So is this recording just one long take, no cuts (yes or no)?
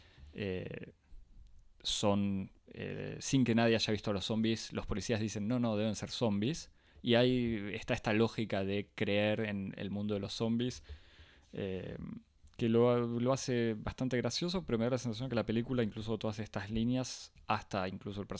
yes